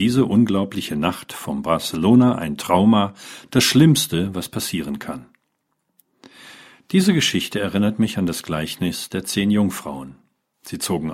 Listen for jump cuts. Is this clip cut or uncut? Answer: uncut